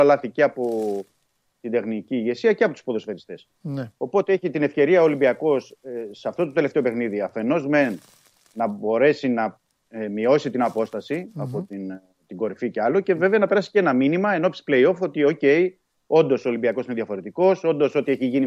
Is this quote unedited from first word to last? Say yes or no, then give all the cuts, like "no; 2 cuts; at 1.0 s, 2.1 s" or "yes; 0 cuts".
yes; 0 cuts